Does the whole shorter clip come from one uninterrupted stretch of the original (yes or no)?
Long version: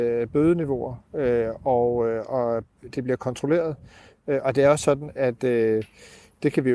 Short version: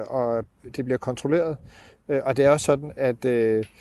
yes